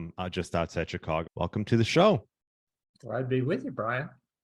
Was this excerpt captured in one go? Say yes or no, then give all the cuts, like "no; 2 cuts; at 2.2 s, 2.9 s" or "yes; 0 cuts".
no; 1 cut; at 1.3 s